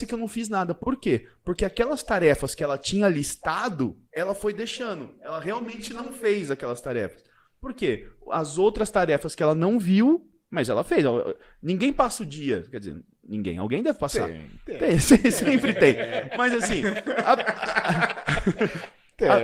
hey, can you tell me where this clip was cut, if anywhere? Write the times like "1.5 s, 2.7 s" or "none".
4.0 s